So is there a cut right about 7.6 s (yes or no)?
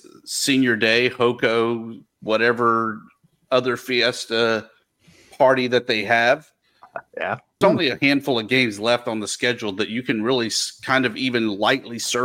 yes